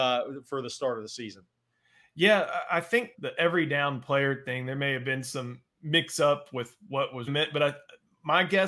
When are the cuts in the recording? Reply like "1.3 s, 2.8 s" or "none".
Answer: 3.1 s, 7.3 s